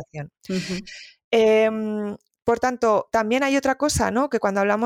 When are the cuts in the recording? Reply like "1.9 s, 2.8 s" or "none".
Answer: none